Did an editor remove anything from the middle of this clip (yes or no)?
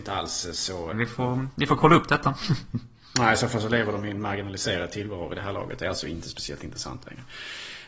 yes